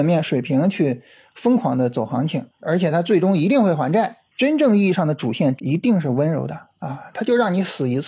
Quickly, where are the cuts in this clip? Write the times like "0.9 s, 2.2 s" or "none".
2.6 s, 4.3 s, 5.6 s